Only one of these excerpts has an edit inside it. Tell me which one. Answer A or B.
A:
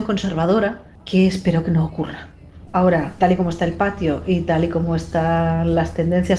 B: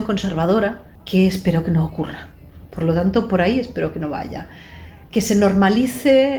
A